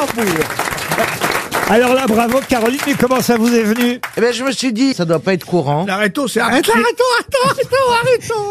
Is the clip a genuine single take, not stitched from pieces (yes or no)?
no